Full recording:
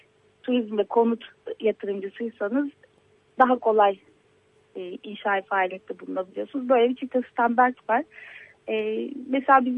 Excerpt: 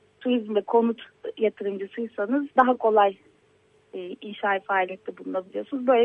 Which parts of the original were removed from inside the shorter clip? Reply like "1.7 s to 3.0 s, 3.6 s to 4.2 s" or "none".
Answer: 2.7 s to 3.3 s